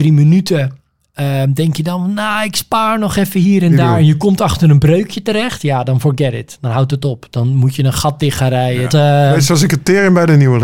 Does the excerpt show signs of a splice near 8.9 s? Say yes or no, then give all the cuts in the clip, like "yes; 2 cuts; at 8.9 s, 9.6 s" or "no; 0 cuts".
yes; 1 cut; at 8.9 s